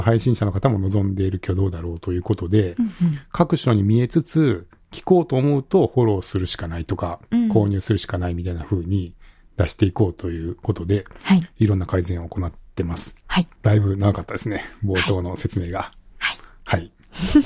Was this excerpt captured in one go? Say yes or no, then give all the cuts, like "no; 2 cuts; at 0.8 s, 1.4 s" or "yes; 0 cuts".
no; 1 cut; at 13.6 s